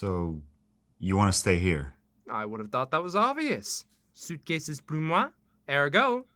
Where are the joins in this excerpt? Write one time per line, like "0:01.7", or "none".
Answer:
none